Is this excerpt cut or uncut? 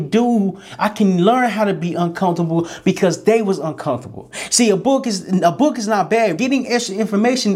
cut